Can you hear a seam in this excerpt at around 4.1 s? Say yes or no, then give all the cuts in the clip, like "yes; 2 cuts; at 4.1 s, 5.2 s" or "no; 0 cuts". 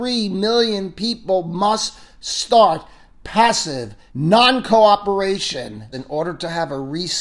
yes; 2 cuts; at 4.1 s, 5.9 s